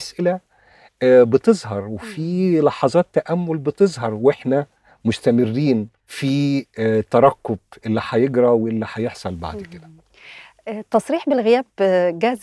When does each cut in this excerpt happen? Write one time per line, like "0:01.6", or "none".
0:06.0
0:07.8